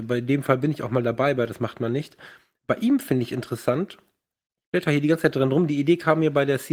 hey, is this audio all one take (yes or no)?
yes